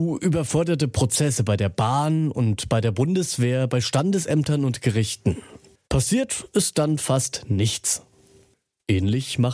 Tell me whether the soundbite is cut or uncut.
cut